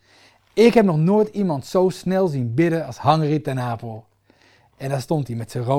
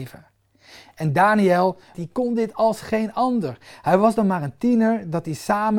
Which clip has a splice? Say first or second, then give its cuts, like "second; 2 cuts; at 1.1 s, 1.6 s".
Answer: second; 1 cut; at 1.9 s